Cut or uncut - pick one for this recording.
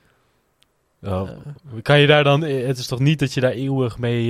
uncut